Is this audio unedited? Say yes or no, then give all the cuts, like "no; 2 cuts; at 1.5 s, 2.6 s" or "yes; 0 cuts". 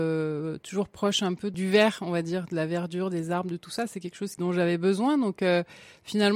yes; 0 cuts